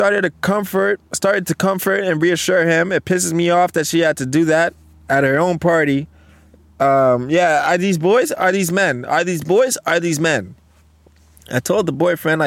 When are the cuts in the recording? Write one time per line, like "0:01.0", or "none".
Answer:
none

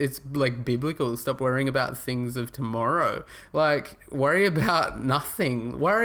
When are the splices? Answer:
none

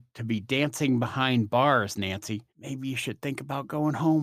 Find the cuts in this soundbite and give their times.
0:02.5

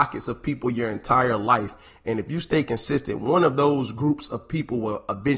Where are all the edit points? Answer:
none

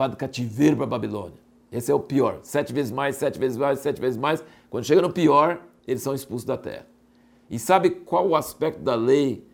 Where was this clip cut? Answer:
none

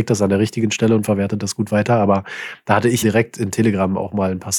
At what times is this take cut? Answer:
0:03.0

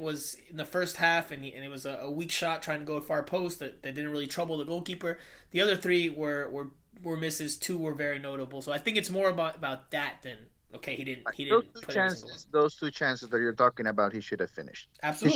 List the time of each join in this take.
none

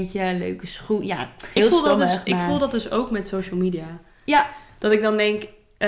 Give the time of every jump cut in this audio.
0:01.6

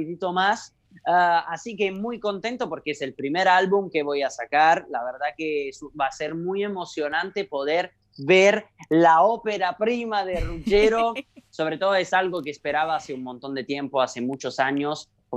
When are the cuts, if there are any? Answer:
none

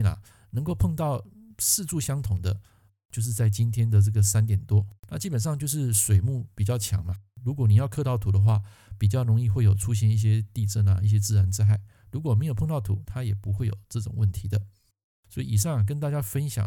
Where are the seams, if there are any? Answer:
0:05.0

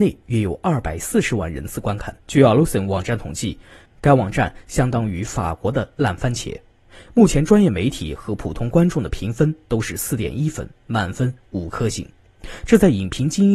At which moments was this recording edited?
0:02.2

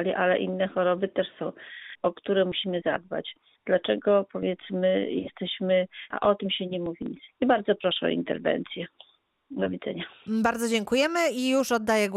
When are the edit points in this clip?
0:06.1

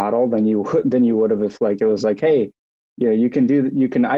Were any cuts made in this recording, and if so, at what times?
none

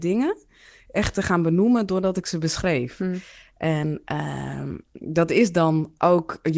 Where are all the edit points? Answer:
none

